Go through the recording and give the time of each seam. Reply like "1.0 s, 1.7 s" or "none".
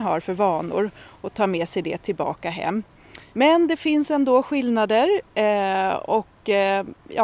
3.3 s